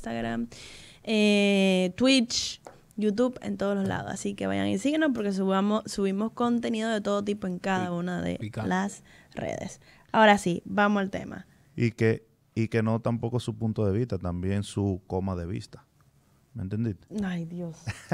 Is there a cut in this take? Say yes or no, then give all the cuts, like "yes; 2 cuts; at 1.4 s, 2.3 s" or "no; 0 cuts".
no; 0 cuts